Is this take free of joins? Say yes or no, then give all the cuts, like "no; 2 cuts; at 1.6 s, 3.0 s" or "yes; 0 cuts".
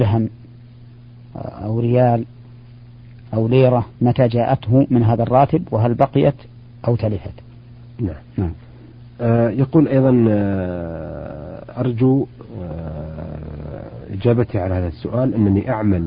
no; 1 cut; at 4.0 s